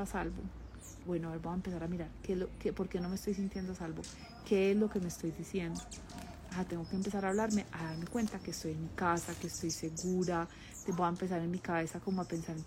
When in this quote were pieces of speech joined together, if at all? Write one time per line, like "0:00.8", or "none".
0:01.0